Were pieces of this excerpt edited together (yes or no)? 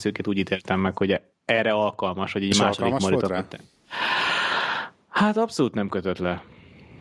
no